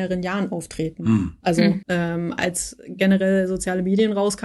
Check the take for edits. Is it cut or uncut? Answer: cut